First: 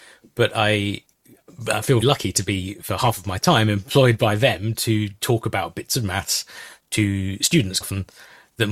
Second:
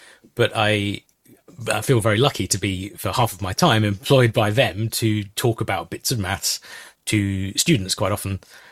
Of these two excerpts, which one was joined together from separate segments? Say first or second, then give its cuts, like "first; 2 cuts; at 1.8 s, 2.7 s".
first; 2 cuts; at 2.0 s, 7.8 s